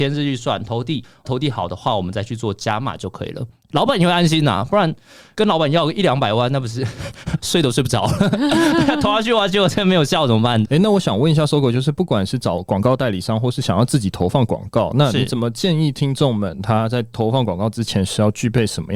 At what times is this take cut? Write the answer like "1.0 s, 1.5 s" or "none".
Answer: 10.6 s